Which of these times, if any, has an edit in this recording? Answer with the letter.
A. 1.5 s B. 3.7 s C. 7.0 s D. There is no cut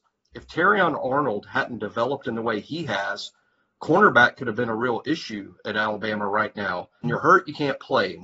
C